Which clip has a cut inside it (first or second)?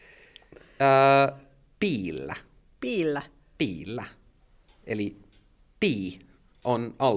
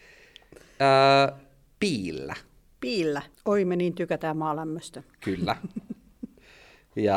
second